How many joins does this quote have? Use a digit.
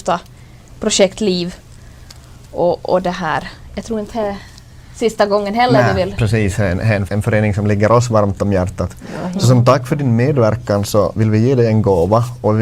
1